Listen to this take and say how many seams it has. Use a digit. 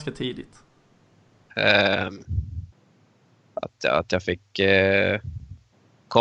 1